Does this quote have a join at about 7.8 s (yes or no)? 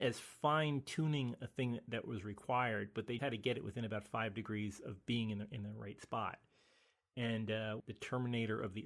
yes